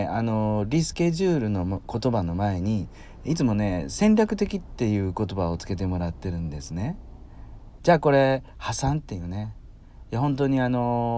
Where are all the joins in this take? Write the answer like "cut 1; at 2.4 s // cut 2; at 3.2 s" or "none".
cut 1; at 7.8 s